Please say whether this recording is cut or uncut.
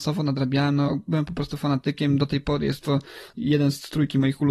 uncut